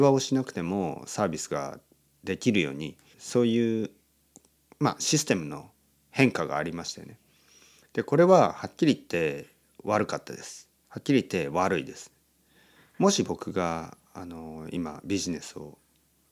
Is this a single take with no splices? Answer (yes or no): no